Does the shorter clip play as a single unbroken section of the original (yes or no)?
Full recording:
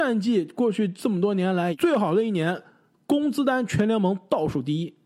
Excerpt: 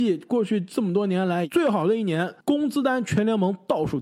no